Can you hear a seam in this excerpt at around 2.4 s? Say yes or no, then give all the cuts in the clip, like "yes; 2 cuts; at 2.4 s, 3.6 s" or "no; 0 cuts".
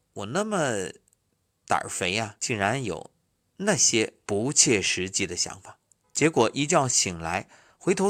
yes; 2 cuts; at 2.4 s, 6.0 s